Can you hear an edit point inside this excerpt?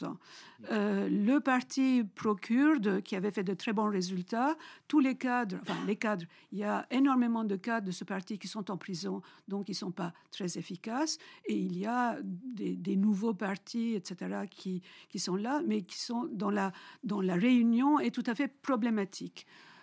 no; 0 cuts

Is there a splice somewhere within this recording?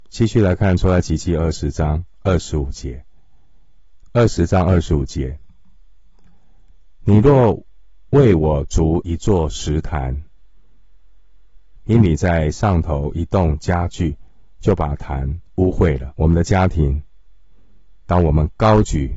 yes; 2 cuts; at 11.8 s, 16.1 s

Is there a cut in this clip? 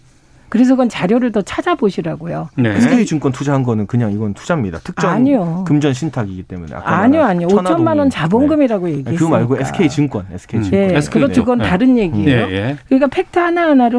no; 0 cuts

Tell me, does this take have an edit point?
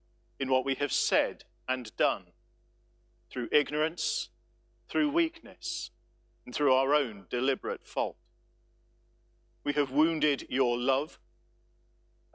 no; 0 cuts

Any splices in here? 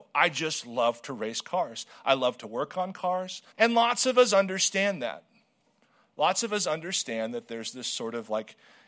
yes; 1 cut; at 3.5 s

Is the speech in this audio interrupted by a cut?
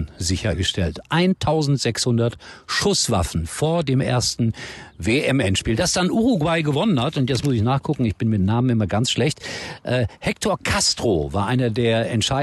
no; 0 cuts

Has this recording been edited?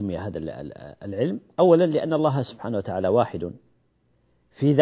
no; 0 cuts

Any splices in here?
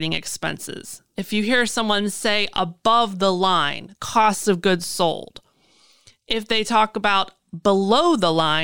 yes; 1 cut; at 3.9 s

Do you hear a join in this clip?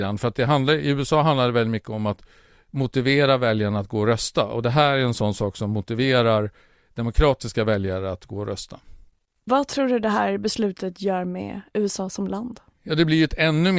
no; 0 cuts

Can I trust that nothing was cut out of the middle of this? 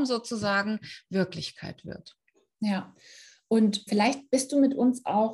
no; 1 cut; at 3.9 s

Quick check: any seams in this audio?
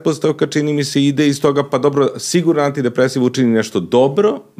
no; 0 cuts

